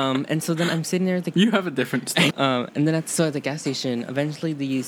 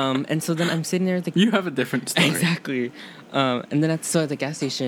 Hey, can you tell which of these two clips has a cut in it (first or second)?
first